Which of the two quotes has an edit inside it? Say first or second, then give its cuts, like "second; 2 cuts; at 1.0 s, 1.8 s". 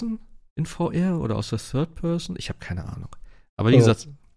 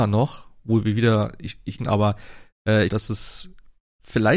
second; 2 cuts; at 1.8 s, 2.9 s